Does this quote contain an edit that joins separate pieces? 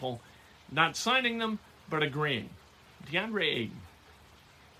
no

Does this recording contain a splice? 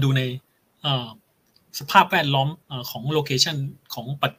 yes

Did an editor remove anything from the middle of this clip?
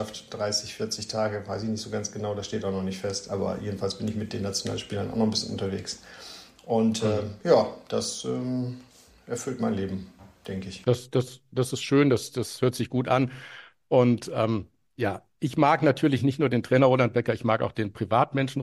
no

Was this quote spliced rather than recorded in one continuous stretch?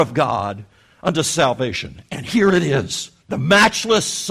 yes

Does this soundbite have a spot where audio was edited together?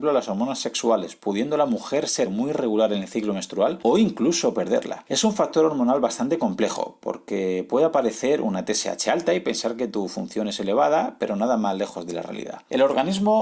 no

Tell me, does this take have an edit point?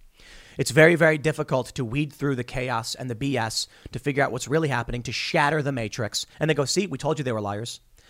yes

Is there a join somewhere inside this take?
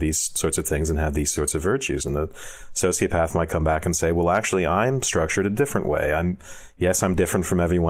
no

